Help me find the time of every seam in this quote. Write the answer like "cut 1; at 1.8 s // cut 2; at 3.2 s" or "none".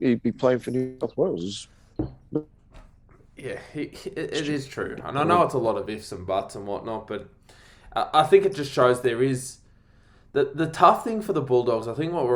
none